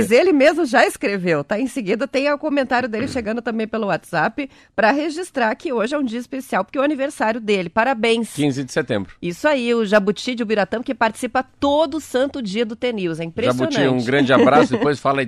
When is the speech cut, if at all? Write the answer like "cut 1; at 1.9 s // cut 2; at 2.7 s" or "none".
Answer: none